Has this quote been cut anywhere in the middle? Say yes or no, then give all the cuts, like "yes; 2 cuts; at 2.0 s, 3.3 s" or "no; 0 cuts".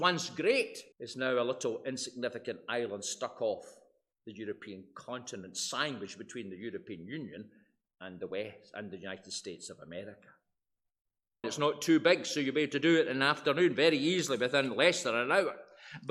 yes; 2 cuts; at 0.9 s, 11.4 s